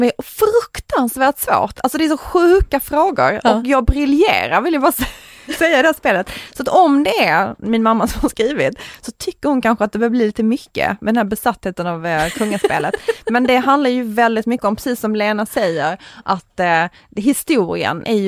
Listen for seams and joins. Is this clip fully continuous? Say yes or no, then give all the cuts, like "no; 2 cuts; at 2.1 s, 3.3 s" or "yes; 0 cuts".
yes; 0 cuts